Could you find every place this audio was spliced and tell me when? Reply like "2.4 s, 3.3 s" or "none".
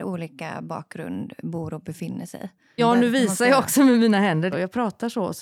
2.8 s, 4.5 s